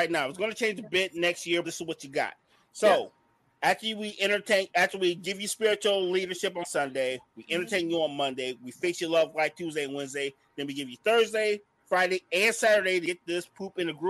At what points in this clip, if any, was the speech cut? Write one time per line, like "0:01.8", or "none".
0:01.6